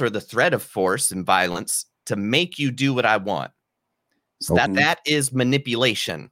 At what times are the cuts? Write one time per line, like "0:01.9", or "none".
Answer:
0:04.7